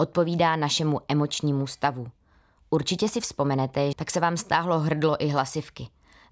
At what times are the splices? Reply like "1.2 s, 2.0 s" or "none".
3.9 s